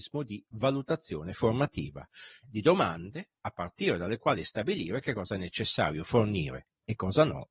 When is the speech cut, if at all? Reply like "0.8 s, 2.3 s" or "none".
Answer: 2.4 s

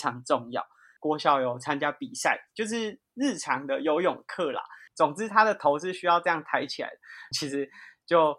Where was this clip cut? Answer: 1.0 s, 4.9 s, 7.3 s

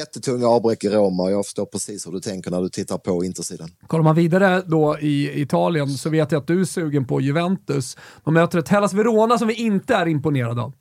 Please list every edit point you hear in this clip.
3.8 s

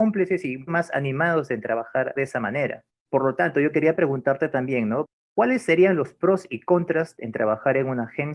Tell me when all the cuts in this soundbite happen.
none

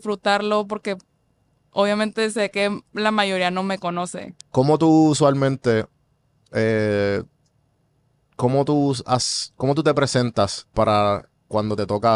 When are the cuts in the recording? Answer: 4.4 s

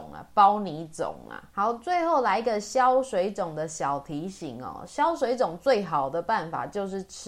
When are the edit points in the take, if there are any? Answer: none

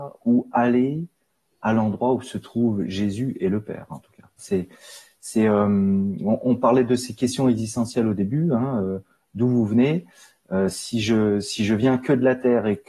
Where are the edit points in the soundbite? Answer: 4.4 s

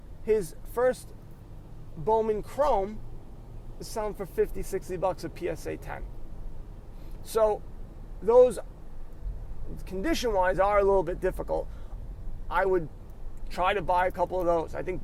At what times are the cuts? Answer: none

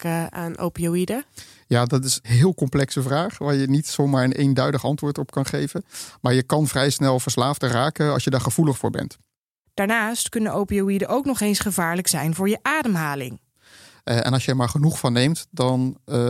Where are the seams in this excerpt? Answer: 13.5 s

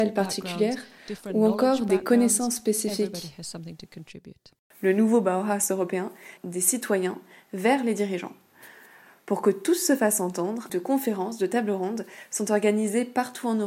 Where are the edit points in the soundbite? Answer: 6.4 s, 10.7 s

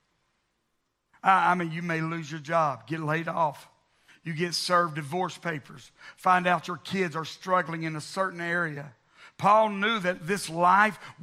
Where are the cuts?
4.1 s

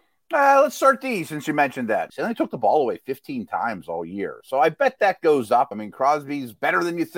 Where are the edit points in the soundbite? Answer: 2.1 s, 5.7 s

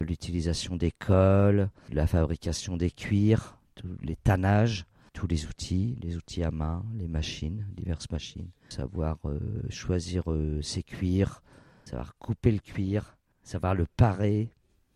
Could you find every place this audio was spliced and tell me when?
none

